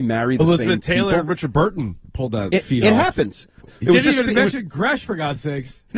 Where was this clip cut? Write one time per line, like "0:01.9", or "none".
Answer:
0:03.6